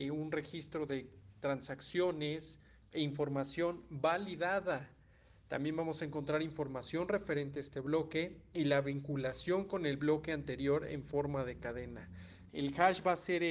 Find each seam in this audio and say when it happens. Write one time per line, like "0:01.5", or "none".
0:12.5